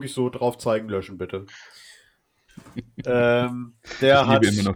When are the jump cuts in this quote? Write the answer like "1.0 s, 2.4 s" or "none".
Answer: 2.5 s